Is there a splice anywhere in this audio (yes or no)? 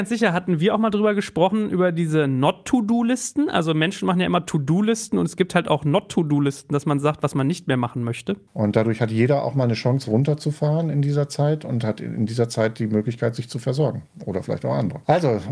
yes